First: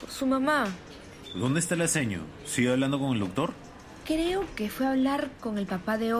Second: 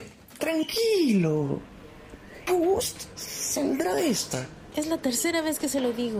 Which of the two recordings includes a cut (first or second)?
second